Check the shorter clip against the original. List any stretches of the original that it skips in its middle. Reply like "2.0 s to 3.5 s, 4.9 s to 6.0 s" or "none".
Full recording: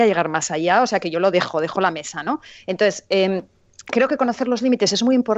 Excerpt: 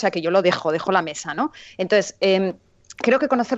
none